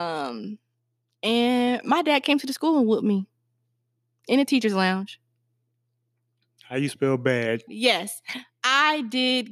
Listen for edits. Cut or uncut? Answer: cut